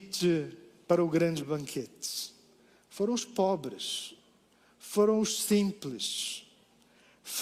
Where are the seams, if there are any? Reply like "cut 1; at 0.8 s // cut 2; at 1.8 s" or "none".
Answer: none